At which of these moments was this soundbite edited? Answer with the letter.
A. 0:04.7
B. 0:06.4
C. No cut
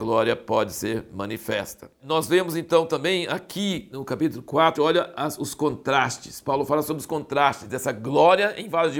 A